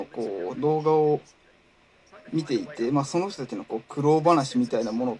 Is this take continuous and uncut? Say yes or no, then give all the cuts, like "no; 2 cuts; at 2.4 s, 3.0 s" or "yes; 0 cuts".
yes; 0 cuts